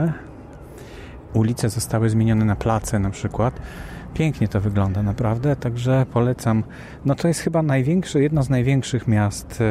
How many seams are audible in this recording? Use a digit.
1